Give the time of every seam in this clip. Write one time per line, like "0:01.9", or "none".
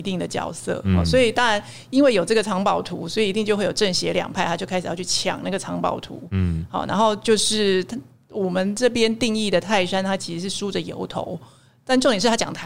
none